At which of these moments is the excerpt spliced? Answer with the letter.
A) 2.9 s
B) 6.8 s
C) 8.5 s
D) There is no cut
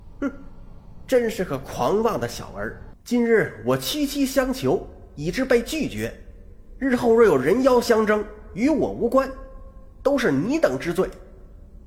A